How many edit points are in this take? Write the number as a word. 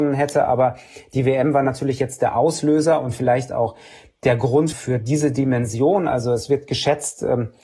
one